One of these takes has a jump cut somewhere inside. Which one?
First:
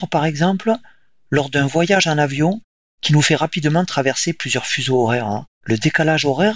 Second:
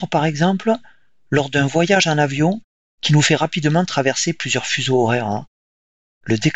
first; 1 cut; at 5.5 s

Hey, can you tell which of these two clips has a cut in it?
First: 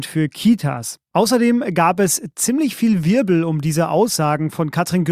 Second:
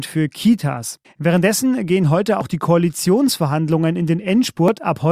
second; 1 cut; at 1.0 s

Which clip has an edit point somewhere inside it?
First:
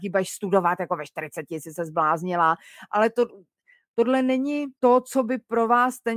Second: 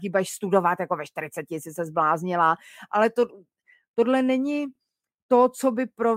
first; 1 cut; at 4.8 s

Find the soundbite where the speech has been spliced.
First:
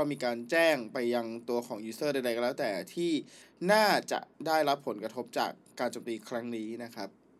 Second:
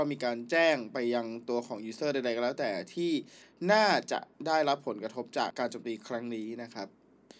second; 1 cut; at 5.5 s

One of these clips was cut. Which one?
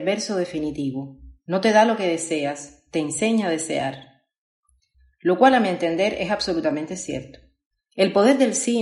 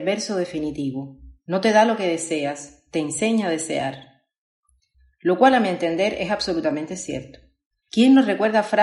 second; 1 cut; at 7.8 s

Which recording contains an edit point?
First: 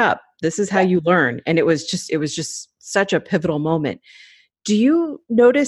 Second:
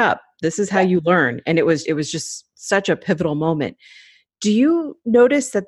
second; 1 cut; at 1.8 s

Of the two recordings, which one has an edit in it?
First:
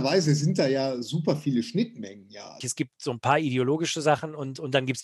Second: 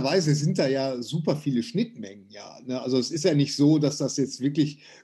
first; 1 cut; at 2.6 s

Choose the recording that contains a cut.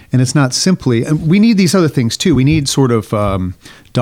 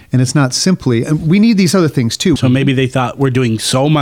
second; 1 cut; at 2.4 s

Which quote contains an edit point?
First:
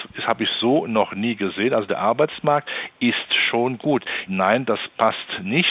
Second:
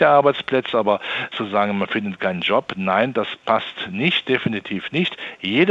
first; 1 cut; at 4.3 s

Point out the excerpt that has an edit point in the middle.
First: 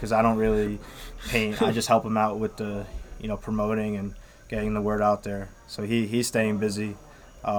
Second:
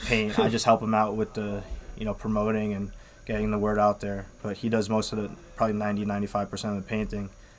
first; 1 cut; at 5.5 s

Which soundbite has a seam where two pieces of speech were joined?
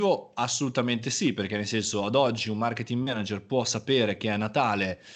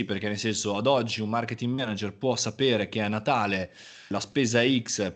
second; 1 cut; at 4.1 s

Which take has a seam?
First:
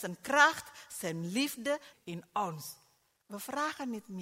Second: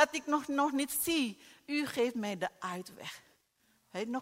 first; 1 cut; at 1.9 s

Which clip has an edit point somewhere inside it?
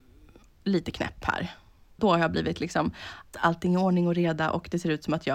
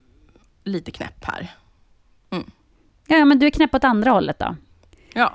first; 2 cuts; at 2.0 s, 3.3 s

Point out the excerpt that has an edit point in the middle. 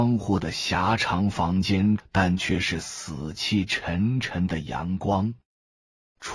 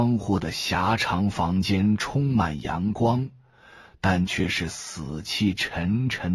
first; 1 cut; at 2.0 s

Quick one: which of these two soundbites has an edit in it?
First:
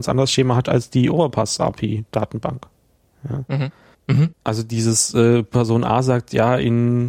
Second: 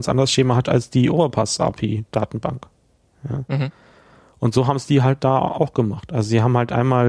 first; 1 cut; at 3.9 s

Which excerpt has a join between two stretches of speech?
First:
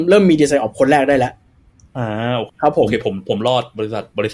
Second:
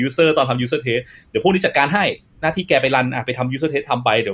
first; 1 cut; at 2.5 s

